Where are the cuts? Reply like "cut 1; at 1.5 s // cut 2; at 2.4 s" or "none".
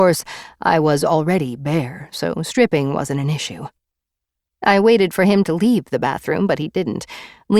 cut 1; at 4.4 s